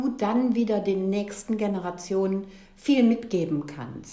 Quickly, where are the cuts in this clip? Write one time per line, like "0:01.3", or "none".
none